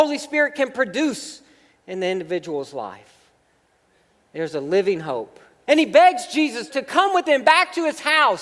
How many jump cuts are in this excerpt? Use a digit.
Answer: 3